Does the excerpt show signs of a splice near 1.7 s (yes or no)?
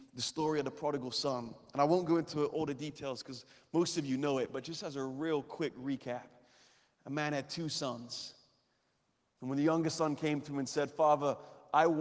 no